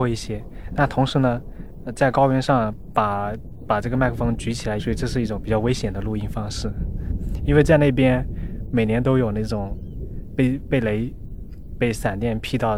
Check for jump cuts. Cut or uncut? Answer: cut